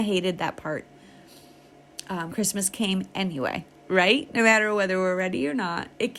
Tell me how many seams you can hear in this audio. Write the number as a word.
one